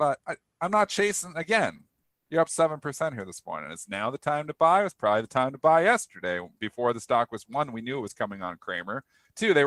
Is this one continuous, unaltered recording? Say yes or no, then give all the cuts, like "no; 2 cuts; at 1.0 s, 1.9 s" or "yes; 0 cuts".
yes; 0 cuts